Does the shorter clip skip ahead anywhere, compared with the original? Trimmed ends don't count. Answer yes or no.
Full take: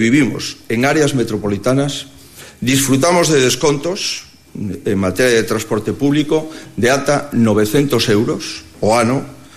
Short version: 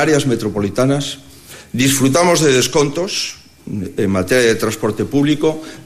no